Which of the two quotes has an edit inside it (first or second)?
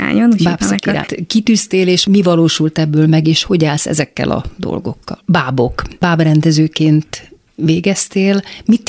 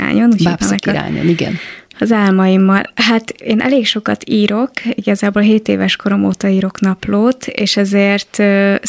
first